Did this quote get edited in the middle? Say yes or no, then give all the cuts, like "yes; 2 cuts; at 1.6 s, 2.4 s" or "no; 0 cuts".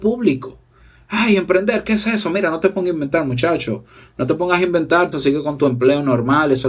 yes; 1 cut; at 5.1 s